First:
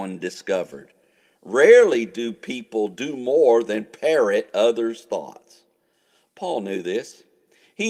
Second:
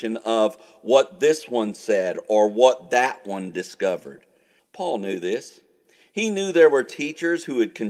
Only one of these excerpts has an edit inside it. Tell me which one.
second; 1 cut; at 4.6 s

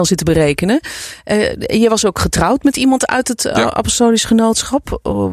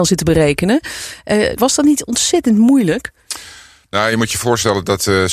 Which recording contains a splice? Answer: second; 1 cut; at 1.6 s

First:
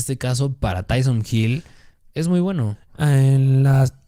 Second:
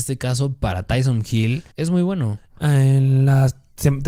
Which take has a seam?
second; 1 cut; at 1.7 s

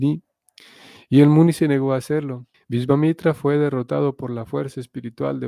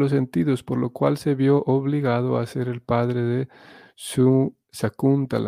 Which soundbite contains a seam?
first; 1 cut; at 2.5 s

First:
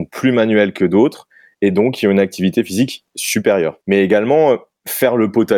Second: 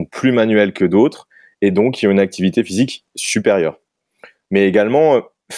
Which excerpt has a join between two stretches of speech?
first; 1 cut; at 3.8 s

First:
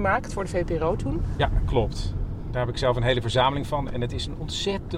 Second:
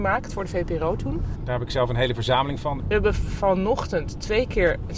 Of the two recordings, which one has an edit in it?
second; 2 cuts; at 1.4 s, 2.8 s

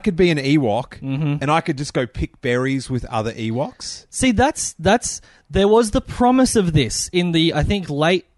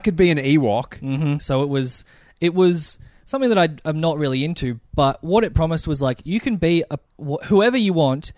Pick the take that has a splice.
second; 2 cuts; at 1.4 s, 7.1 s

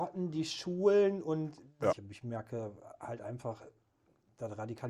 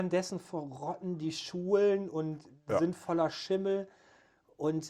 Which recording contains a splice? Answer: first; 1 cut; at 1.9 s

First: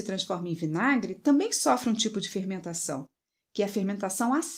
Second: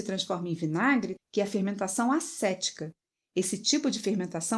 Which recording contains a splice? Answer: second; 1 cut; at 1.2 s

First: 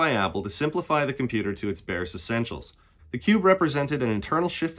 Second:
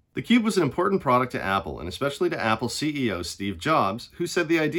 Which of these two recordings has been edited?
first; 1 cut; at 3.0 s

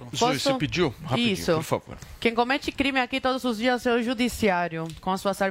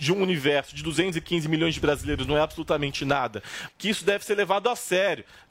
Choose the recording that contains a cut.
second; 1 cut; at 3.7 s

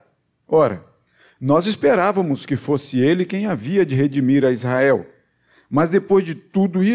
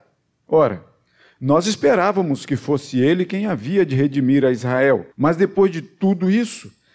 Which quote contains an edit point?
second; 1 cut; at 5.1 s

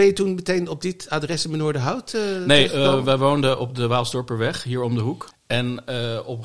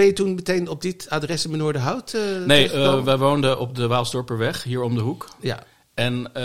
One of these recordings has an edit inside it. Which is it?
first; 1 cut; at 5.3 s

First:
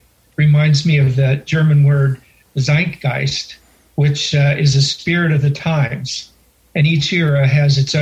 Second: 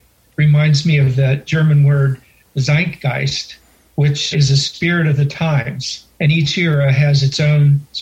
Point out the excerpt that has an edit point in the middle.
second; 2 cuts; at 4.3 s, 6.1 s

